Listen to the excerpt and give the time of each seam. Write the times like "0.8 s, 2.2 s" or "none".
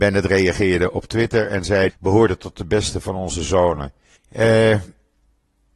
1.9 s, 4.2 s

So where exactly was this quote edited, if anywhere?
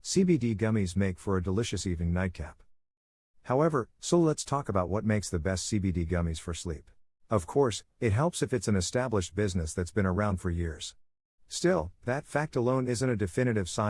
4.0 s, 7.1 s

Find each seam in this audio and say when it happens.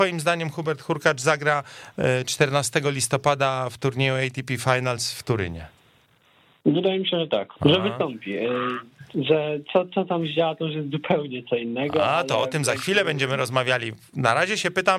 7.6 s

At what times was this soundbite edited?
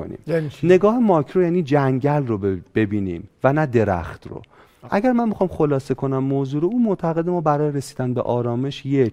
4.9 s

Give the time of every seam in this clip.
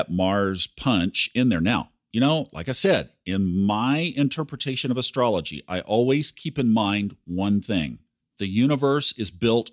none

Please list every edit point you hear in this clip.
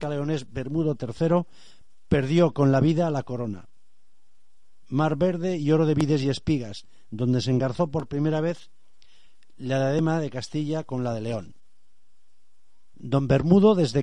12.9 s

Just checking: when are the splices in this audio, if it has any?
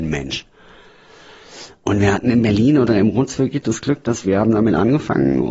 4.2 s

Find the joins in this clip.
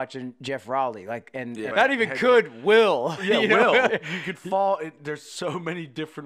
1.7 s, 3.9 s

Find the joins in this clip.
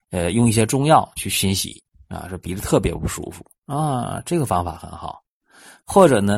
3.6 s

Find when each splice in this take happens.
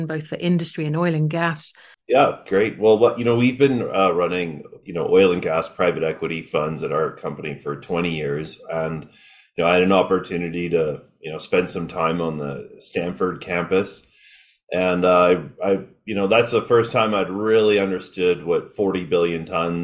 1.9 s

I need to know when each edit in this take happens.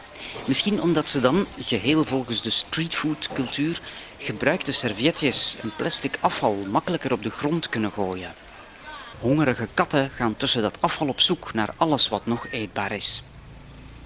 9.1 s

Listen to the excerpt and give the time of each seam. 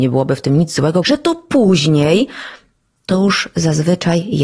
1.0 s

